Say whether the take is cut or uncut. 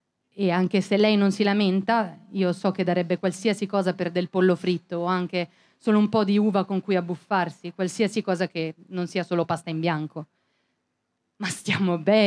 uncut